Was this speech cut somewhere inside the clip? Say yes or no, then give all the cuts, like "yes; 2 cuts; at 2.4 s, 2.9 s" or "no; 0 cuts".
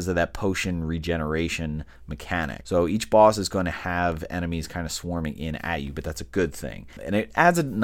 yes; 1 cut; at 2.6 s